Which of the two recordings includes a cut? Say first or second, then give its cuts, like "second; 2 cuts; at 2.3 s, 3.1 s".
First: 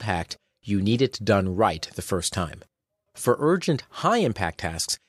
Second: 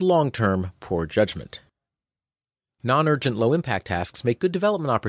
first; 1 cut; at 3.1 s